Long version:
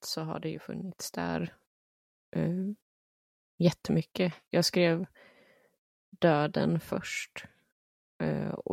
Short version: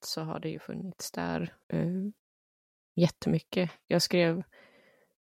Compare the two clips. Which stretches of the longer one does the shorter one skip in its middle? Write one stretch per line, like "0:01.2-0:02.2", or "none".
0:01.6-0:02.3